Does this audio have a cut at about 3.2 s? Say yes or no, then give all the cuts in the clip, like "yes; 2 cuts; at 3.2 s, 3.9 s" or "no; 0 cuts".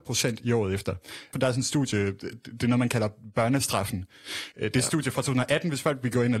no; 2 cuts; at 1.3 s, 4.5 s